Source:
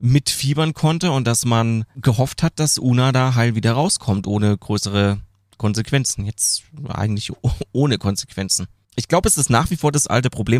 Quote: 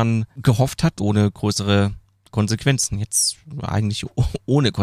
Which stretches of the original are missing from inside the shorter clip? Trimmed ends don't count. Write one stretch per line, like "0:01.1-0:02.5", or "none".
0:02.6-0:04.2